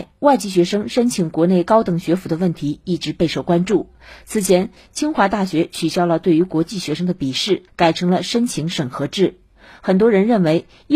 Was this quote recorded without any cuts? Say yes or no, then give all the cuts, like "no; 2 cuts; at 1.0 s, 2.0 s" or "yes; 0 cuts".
yes; 0 cuts